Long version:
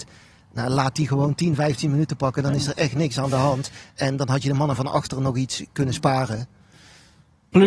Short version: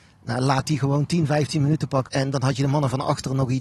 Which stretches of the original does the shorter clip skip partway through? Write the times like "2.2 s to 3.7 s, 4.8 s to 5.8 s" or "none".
2.4 s to 3.9 s